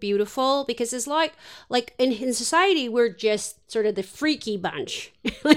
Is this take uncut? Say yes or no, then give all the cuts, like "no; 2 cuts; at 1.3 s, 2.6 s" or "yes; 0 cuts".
yes; 0 cuts